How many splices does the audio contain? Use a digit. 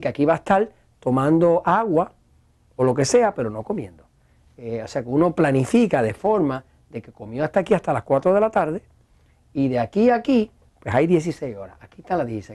0